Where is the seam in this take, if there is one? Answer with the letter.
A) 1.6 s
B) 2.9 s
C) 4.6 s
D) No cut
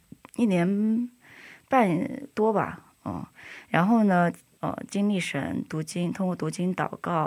C